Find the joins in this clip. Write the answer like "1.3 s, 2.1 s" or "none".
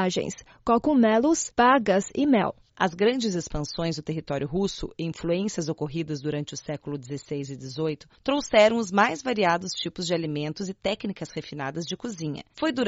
2.7 s